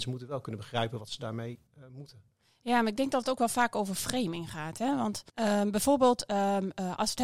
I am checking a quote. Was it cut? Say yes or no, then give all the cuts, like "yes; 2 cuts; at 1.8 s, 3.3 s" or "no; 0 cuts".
yes; 2 cuts; at 1.7 s, 5.3 s